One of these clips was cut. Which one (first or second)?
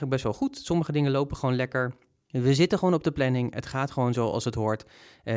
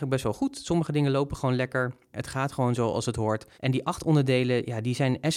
second